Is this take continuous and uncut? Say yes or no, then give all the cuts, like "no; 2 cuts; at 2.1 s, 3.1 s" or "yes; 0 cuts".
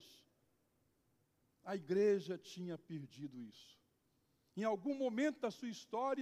yes; 0 cuts